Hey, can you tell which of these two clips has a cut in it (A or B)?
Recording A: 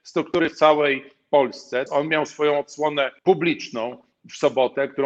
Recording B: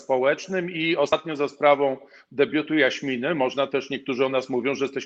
A